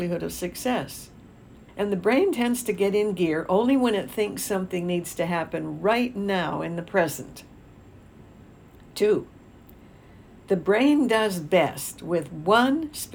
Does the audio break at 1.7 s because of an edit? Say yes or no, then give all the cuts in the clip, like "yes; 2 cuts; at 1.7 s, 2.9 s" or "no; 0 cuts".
yes; 1 cut; at 1.7 s